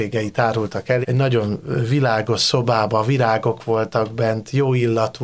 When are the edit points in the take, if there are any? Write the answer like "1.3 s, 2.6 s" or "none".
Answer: 1.0 s

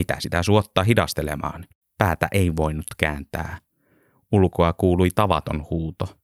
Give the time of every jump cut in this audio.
1.8 s

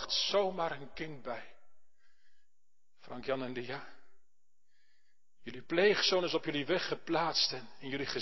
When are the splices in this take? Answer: none

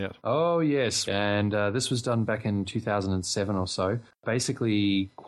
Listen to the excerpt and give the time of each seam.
1.1 s

